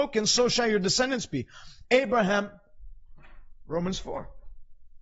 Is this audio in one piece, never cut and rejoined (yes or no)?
no